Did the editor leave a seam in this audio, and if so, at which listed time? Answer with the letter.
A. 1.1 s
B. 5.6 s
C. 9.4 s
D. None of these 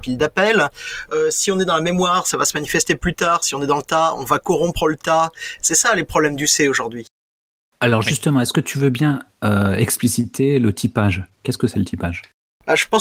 B